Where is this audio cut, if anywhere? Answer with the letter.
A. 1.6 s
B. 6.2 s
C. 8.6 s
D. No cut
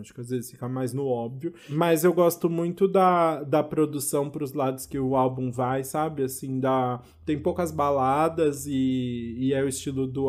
D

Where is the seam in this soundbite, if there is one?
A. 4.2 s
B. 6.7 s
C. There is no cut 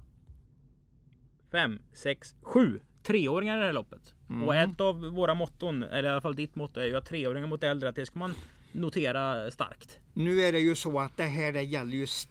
C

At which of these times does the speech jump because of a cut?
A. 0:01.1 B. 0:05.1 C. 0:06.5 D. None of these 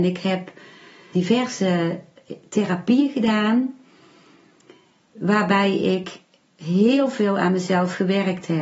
A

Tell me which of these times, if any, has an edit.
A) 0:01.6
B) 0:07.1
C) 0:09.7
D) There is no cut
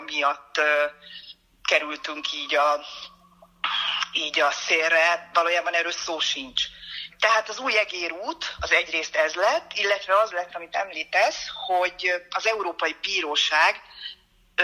B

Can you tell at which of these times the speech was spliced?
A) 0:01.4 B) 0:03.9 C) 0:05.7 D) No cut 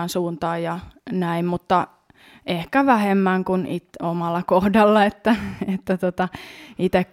D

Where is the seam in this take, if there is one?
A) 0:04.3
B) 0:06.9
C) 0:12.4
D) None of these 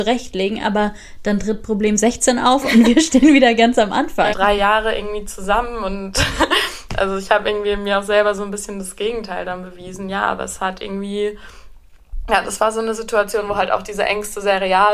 A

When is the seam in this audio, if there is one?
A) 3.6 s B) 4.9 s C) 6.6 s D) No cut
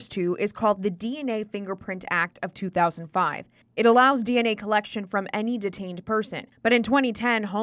D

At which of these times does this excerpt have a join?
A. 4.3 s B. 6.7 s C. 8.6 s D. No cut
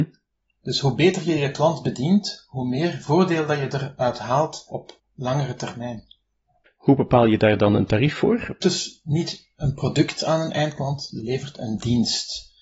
C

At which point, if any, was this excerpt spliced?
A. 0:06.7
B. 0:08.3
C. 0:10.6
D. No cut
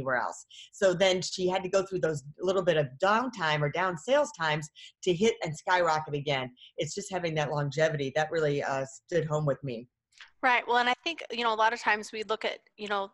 D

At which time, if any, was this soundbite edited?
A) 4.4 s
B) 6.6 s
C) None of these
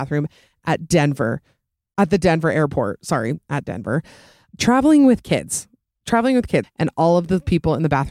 B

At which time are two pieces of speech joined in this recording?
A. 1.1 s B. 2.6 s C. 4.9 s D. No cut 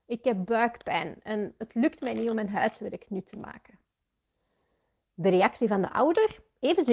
D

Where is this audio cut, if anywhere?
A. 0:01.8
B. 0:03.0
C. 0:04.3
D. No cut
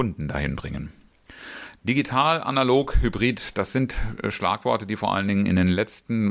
A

